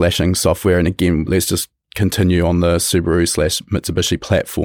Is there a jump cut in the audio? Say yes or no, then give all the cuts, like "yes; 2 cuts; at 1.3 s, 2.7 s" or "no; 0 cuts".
yes; 1 cut; at 1.3 s